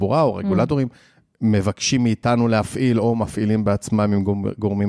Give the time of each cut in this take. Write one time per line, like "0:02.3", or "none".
none